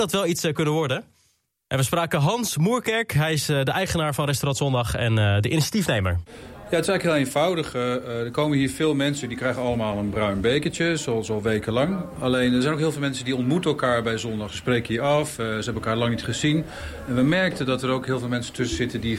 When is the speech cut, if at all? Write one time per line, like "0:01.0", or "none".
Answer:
none